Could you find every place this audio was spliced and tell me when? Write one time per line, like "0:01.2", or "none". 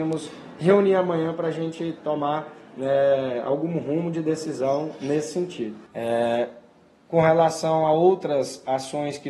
0:05.9